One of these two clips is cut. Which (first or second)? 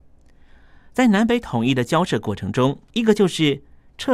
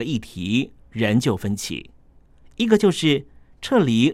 first